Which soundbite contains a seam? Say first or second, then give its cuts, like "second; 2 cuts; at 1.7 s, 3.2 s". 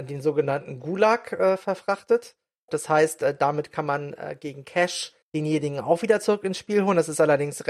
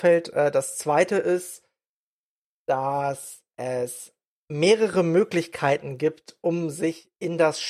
first; 2 cuts; at 2.7 s, 5.2 s